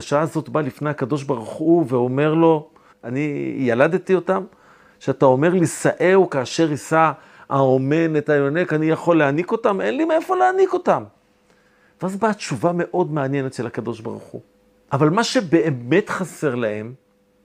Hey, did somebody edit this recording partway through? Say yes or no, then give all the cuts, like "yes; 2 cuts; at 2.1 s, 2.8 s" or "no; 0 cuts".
yes; 2 cuts; at 2.9 s, 14.9 s